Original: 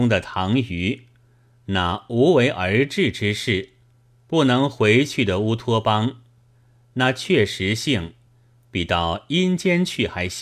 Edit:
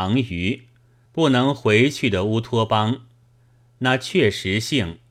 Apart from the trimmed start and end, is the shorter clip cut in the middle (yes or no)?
yes